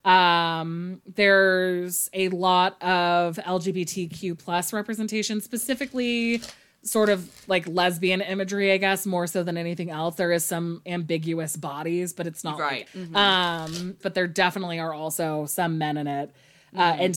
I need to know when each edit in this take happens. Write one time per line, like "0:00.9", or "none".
0:12.9
0:14.0